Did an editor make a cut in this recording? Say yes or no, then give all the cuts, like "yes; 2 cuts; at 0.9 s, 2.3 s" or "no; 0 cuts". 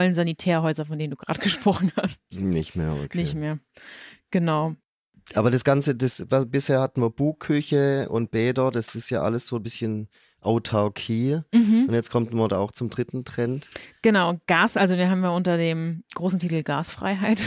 yes; 1 cut; at 2.3 s